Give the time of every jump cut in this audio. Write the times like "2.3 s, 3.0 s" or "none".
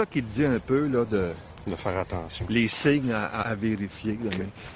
3.4 s